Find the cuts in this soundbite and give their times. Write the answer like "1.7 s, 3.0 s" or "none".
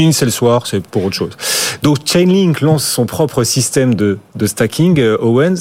none